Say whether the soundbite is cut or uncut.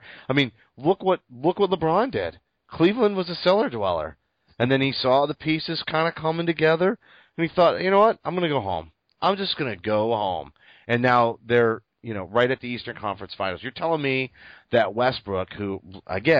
uncut